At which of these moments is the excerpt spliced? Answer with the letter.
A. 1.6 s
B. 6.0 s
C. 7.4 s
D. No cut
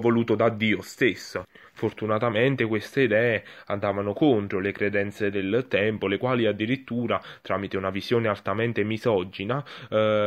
D